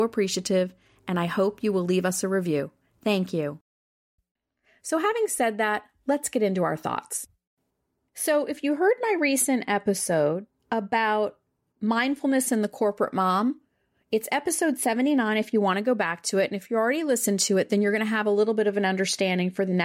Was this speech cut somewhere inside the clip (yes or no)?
no